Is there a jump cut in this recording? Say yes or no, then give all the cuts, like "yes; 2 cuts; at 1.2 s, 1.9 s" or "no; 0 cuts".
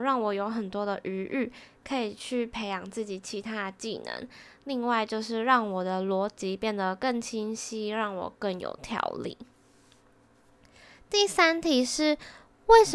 no; 0 cuts